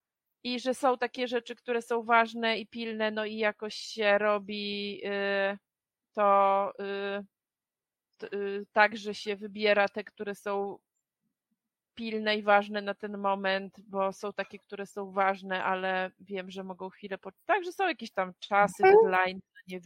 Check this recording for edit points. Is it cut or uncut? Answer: uncut